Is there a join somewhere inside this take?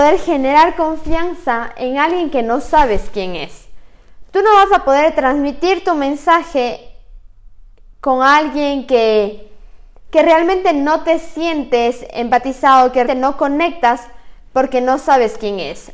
yes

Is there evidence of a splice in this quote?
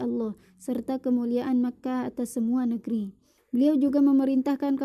yes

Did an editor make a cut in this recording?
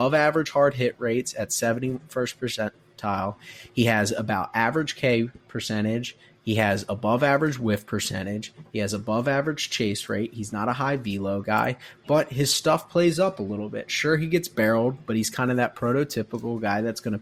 yes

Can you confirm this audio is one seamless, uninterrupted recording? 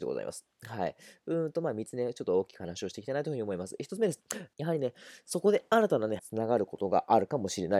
no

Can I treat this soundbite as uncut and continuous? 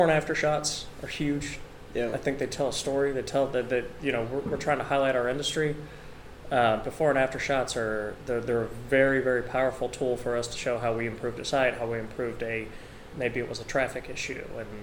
yes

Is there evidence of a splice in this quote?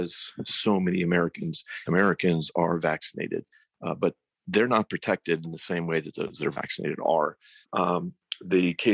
yes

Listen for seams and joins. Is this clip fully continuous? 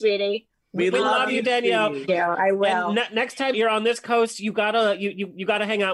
no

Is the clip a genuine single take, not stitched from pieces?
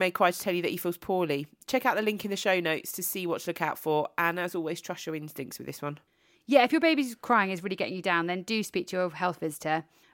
yes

